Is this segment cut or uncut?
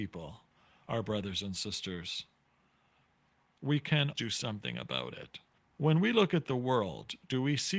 cut